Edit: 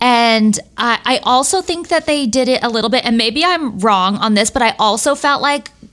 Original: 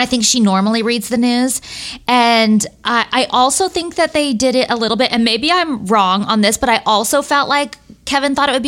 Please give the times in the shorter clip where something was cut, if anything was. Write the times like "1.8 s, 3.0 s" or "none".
none